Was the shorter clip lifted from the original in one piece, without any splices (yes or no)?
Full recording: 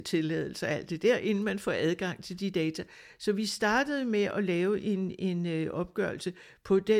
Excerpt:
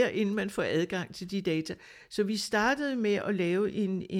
yes